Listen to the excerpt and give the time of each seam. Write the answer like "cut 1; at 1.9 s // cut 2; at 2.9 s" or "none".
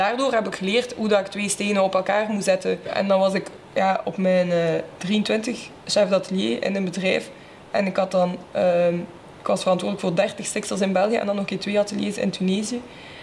none